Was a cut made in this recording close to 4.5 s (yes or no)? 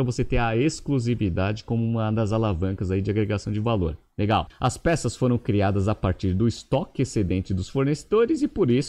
yes